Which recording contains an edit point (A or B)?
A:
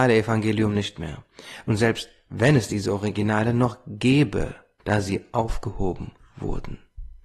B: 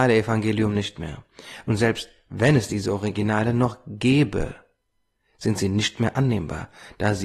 A